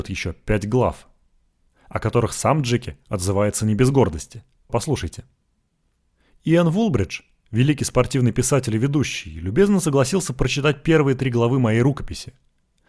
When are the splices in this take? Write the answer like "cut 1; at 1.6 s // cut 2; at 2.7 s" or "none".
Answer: cut 1; at 4.7 s